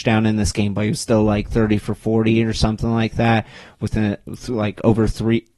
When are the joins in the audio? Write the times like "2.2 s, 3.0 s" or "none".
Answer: none